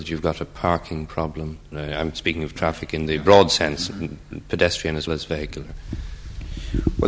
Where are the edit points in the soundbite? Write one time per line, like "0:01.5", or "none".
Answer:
0:01.7
0:05.1